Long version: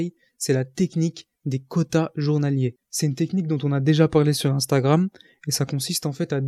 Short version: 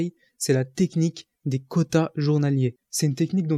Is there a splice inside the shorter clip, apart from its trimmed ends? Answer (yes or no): no